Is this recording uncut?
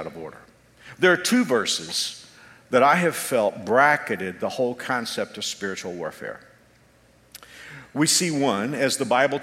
yes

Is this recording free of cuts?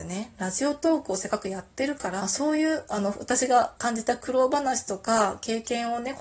no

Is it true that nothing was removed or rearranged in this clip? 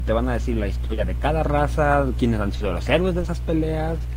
no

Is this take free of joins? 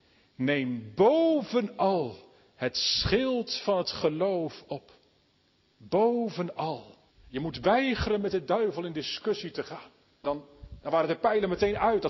no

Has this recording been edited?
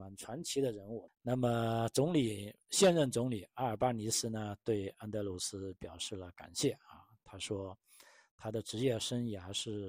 yes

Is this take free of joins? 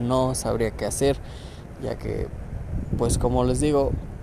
yes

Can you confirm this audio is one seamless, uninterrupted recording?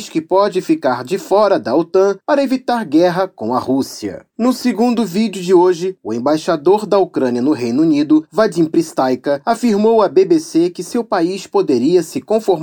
no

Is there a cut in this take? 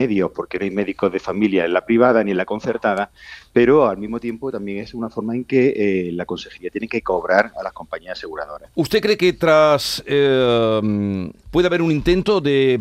yes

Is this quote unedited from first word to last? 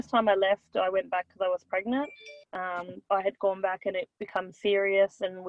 no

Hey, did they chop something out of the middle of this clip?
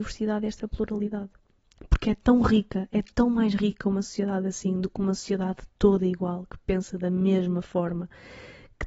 no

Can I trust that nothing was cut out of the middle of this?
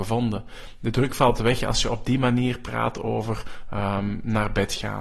yes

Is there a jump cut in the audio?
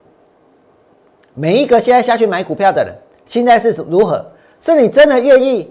no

